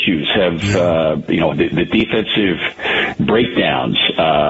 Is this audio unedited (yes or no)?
no